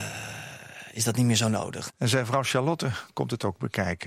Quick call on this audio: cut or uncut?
cut